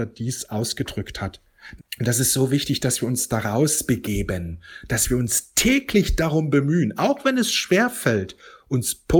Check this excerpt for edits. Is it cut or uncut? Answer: cut